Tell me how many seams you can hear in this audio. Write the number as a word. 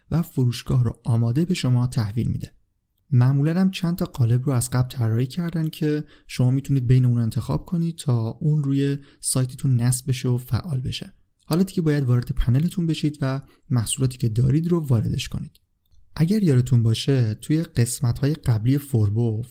zero